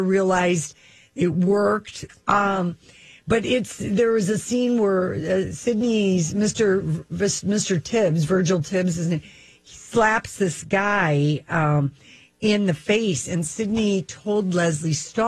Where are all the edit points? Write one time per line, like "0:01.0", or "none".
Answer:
0:02.1